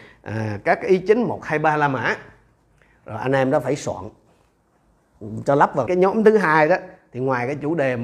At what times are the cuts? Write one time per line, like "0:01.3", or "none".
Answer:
0:05.9